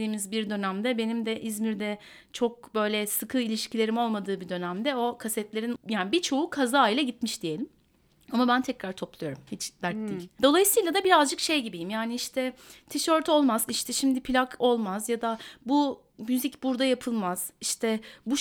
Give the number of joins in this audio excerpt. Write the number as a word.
two